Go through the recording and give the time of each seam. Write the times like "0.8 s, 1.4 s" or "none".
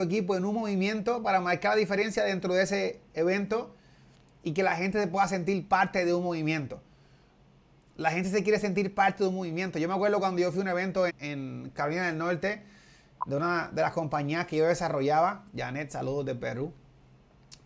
11.1 s

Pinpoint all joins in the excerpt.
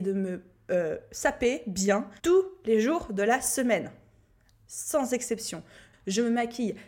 2.2 s, 5.9 s

